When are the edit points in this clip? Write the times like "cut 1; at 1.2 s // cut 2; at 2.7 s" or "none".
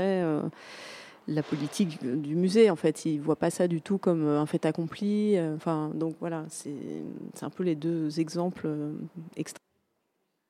none